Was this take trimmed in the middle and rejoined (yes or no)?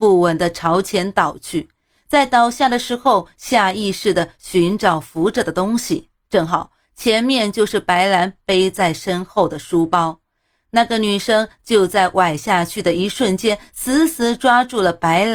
no